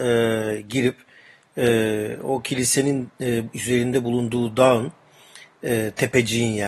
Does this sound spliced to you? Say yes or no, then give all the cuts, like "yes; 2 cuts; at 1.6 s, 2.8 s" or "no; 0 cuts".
no; 0 cuts